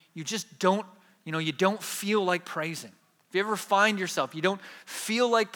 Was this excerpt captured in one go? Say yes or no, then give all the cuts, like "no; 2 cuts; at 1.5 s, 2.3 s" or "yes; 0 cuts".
yes; 0 cuts